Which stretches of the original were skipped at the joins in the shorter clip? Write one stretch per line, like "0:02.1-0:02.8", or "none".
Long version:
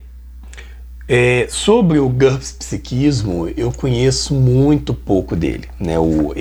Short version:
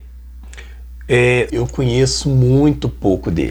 0:01.5-0:03.5